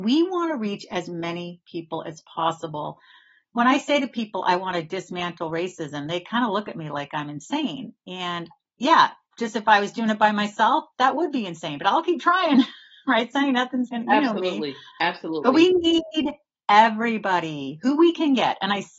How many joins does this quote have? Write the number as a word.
zero